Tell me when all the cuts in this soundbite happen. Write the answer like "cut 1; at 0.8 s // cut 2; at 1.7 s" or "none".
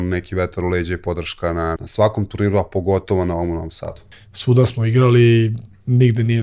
cut 1; at 1.8 s // cut 2; at 4.1 s